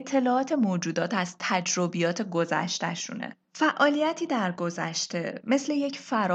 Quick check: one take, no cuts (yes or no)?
no